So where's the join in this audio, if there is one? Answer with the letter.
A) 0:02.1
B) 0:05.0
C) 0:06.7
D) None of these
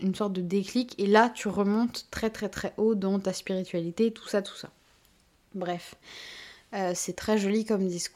D